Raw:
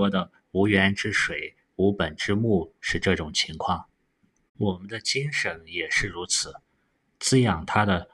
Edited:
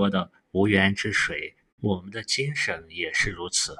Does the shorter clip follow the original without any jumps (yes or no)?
no